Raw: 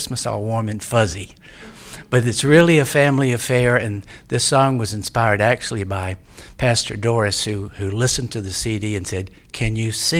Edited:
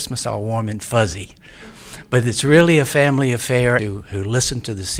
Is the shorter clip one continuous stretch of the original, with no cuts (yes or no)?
no